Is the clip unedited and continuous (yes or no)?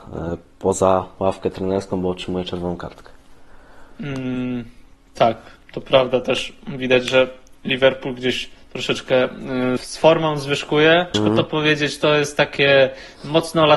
no